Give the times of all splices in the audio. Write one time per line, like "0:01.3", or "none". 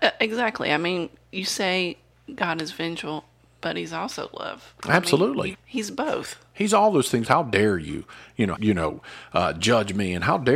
0:05.5
0:07.2
0:08.5